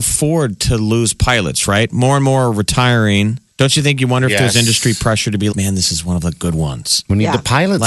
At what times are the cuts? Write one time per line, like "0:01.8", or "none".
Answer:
0:03.5
0:05.5